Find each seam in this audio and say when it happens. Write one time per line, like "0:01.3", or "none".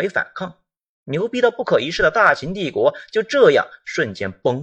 none